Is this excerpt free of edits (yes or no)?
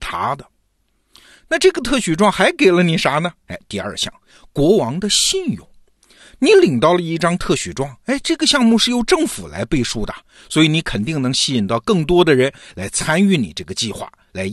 yes